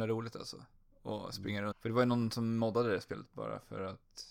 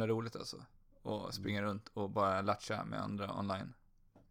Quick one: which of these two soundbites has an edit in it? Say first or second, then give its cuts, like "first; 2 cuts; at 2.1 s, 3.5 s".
first; 1 cut; at 1.7 s